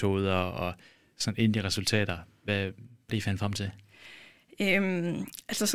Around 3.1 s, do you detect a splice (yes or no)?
yes